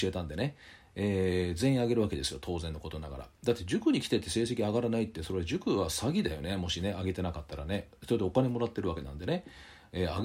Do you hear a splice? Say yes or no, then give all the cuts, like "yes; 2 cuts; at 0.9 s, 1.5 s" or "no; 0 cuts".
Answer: no; 0 cuts